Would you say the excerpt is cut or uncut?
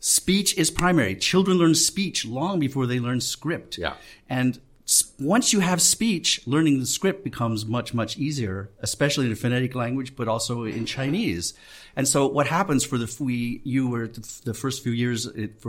uncut